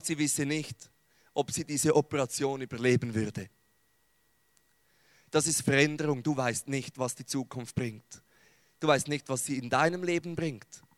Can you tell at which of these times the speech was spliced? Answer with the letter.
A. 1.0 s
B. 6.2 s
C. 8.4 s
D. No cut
D